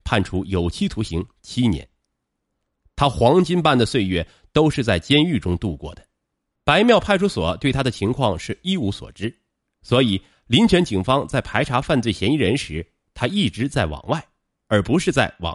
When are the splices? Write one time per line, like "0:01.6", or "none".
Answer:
0:06.6
0:09.8